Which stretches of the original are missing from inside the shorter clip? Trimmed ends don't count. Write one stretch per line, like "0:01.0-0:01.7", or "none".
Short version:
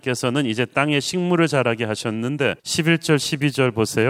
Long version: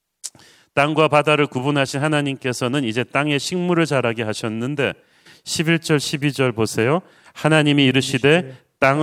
0:05.0-0:05.4